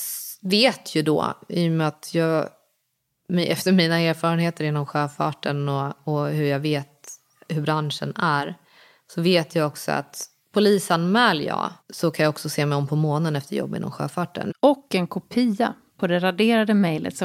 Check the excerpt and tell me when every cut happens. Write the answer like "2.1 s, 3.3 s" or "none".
11.8 s, 14.5 s